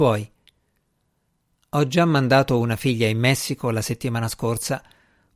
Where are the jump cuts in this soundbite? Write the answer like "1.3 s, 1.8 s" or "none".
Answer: none